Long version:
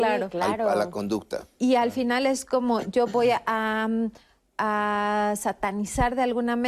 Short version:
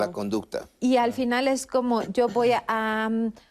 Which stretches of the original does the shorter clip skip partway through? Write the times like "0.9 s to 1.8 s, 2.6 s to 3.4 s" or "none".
none